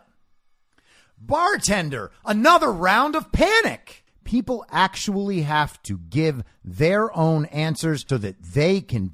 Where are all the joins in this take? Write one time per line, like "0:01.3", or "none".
0:04.1
0:08.1